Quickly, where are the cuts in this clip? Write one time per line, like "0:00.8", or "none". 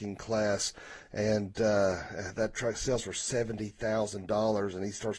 none